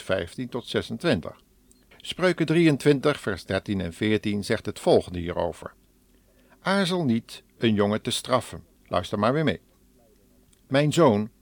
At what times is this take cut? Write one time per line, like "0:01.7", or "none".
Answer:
0:01.9
0:08.8